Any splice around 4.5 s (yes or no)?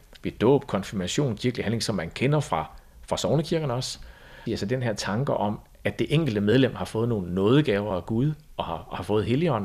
yes